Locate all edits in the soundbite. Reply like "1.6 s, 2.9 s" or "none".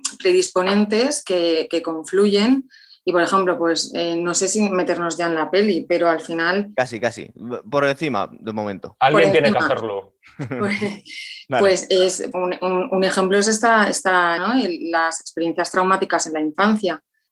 12.3 s, 14.4 s